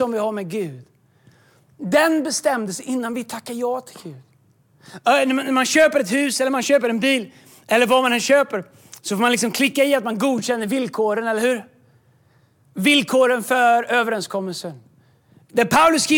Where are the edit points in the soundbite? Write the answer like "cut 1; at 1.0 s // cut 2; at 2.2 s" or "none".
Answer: none